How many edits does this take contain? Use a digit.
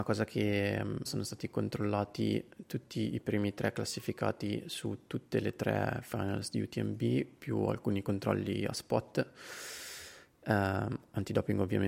1